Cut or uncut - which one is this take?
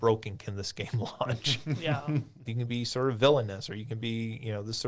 cut